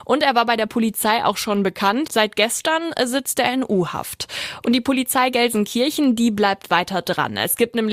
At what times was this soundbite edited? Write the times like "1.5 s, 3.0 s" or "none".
2.1 s